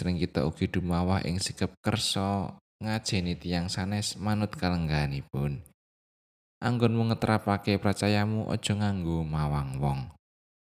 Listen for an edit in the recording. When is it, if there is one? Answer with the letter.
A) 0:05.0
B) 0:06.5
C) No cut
B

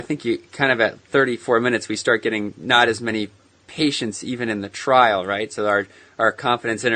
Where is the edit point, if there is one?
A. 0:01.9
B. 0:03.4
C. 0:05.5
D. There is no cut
D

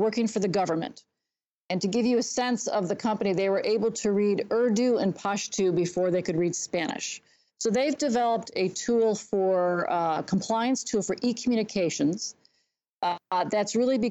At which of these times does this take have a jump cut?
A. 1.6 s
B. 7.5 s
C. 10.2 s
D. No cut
B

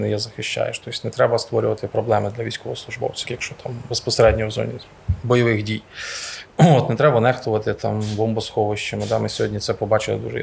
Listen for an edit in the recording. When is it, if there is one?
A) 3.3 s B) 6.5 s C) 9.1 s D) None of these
A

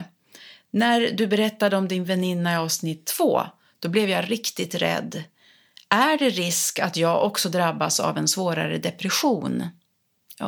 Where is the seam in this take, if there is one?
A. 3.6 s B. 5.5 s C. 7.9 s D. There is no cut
D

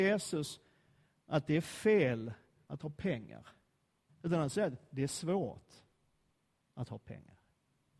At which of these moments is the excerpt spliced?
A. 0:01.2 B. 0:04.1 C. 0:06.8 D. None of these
B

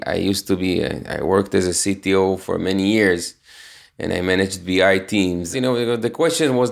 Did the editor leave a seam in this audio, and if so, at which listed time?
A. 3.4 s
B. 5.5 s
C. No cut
B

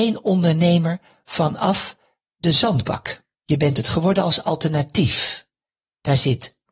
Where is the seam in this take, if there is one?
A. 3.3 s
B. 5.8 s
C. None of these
A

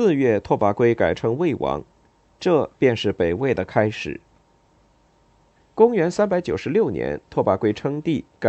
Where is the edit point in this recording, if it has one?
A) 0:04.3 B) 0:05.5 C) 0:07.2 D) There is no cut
B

